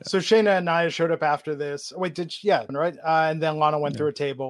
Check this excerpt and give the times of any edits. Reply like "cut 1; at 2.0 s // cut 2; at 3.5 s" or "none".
cut 1; at 2.7 s